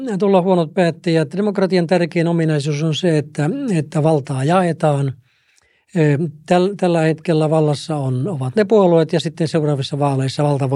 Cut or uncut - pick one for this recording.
uncut